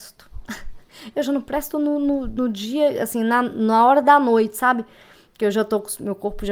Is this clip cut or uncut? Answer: uncut